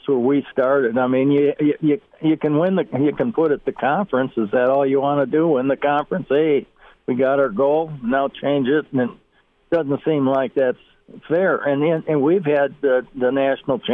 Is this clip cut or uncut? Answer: uncut